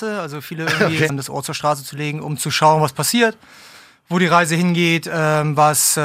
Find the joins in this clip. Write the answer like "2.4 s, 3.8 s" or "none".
1.1 s